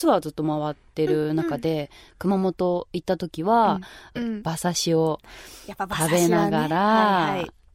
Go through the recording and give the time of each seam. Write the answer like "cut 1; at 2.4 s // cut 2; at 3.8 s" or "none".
cut 1; at 4.2 s